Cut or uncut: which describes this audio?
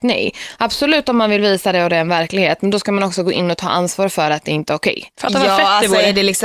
uncut